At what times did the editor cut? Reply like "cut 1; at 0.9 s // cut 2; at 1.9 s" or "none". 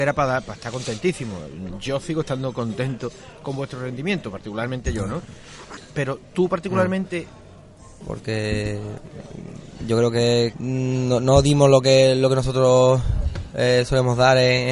cut 1; at 5.8 s // cut 2; at 8.0 s // cut 3; at 10.5 s